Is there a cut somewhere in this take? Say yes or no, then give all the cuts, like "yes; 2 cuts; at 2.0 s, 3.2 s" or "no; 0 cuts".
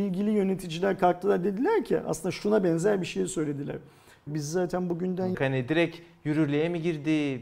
yes; 2 cuts; at 4.3 s, 5.3 s